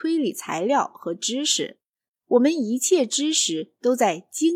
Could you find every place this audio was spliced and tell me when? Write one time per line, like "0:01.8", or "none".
0:02.1